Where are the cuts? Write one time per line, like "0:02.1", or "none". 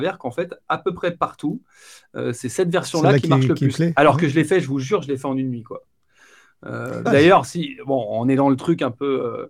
0:07.1